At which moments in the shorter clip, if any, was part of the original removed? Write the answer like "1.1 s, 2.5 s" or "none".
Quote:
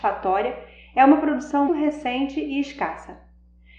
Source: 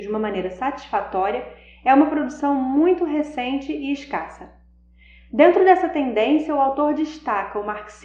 1.7 s